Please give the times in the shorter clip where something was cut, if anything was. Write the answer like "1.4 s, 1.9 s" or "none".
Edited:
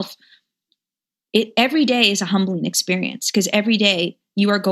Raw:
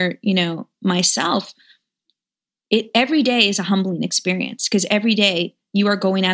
none